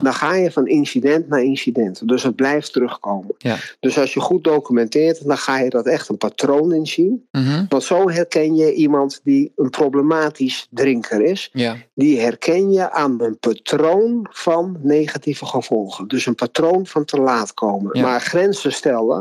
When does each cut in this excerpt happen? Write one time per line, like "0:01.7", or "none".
0:17.9

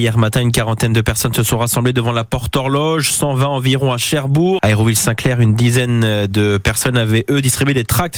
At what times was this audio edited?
0:04.6

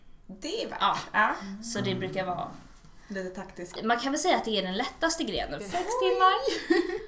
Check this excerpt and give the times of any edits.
0:03.8
0:05.6

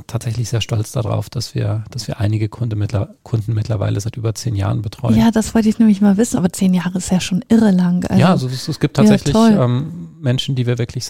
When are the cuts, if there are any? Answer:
0:06.3

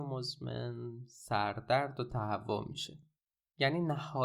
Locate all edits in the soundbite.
none

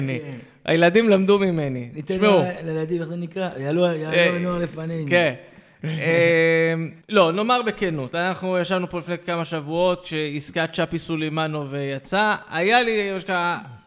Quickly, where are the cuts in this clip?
0:07.0

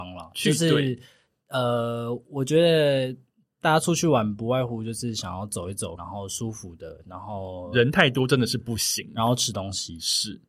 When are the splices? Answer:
0:06.0

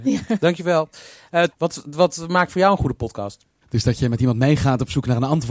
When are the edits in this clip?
0:01.5
0:03.6

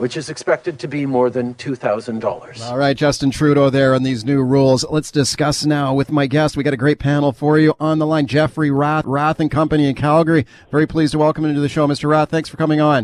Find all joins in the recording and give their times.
0:09.0

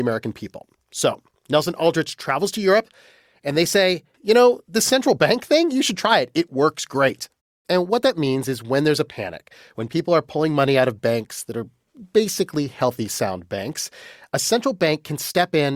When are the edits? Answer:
0:04.1
0:07.6

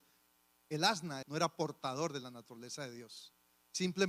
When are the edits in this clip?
0:01.2

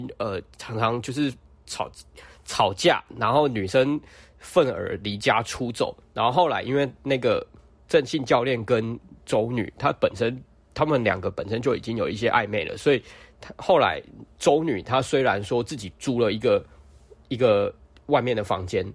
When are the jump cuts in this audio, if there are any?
none

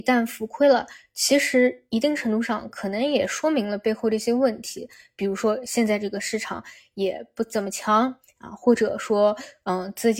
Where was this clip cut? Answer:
none

